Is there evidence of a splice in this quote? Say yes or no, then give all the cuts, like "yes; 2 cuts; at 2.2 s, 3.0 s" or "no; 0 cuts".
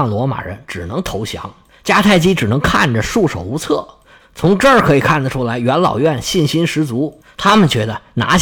yes; 1 cut; at 4.2 s